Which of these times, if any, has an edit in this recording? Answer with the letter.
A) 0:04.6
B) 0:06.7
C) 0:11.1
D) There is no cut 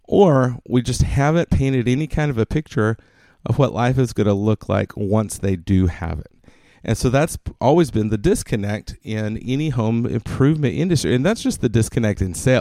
D